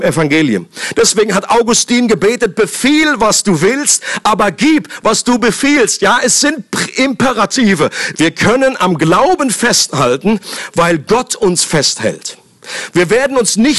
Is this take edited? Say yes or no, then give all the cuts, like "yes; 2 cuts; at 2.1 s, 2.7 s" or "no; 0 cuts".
yes; 1 cut; at 8.1 s